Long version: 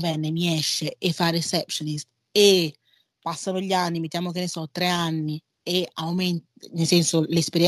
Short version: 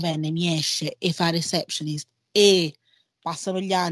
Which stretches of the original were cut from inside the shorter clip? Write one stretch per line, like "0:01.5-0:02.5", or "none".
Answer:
none